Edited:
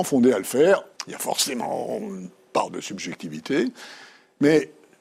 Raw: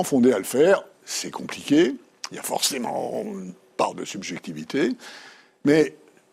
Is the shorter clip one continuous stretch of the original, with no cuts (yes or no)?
no